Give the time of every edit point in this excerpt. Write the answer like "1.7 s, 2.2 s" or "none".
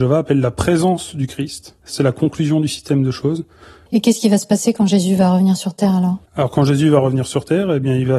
1.8 s, 3.9 s, 6.3 s